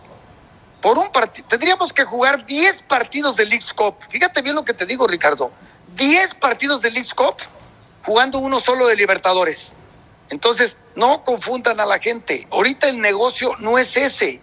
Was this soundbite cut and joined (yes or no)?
no